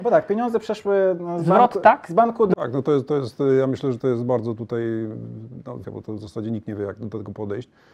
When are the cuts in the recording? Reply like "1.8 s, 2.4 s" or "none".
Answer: 2.5 s, 5.8 s